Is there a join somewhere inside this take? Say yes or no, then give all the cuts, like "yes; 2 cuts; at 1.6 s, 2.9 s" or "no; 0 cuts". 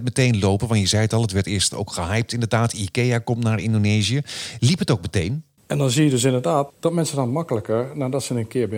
yes; 2 cuts; at 5.6 s, 6.7 s